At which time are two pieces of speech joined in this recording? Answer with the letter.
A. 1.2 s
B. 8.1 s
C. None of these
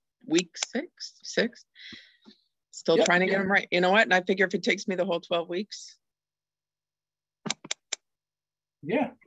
A